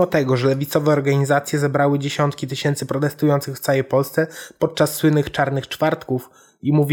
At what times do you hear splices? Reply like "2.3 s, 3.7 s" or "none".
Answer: none